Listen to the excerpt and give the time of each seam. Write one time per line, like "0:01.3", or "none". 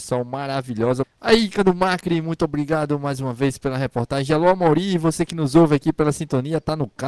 0:01.0